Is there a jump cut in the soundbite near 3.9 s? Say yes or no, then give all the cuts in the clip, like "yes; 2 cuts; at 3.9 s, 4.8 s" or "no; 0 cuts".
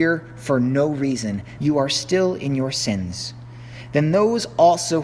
no; 1 cut; at 1.6 s